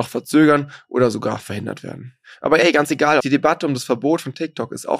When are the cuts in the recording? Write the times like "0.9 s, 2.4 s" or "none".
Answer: 3.2 s